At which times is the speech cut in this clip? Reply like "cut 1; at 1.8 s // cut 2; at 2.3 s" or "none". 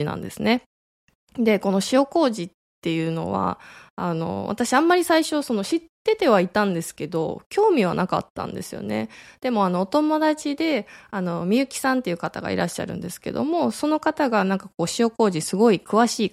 none